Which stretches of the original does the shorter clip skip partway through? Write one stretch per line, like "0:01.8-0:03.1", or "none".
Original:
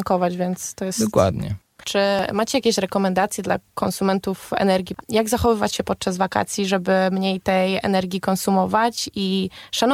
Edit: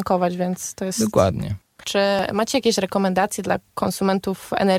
none